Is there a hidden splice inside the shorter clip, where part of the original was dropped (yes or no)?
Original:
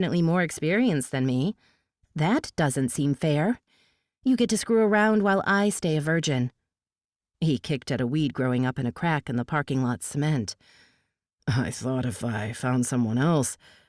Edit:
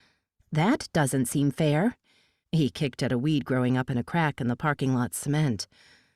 yes